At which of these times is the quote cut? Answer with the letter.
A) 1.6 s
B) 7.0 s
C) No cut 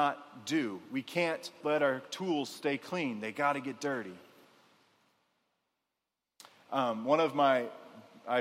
A